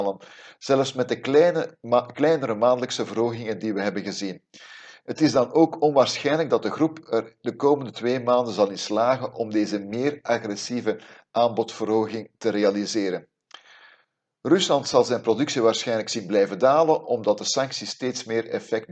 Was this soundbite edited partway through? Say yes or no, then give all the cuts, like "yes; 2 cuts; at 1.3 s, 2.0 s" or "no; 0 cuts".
no; 0 cuts